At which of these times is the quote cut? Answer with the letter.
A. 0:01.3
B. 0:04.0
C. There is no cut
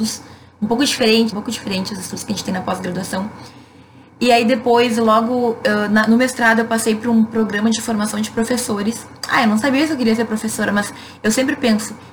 A